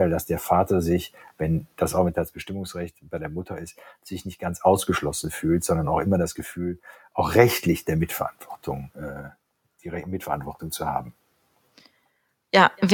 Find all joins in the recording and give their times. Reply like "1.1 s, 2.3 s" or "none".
none